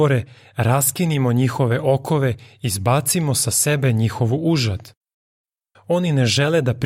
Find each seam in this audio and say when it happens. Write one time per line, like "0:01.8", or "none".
0:05.7